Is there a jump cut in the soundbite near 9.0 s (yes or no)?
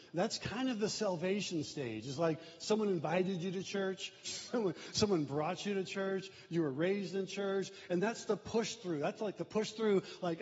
no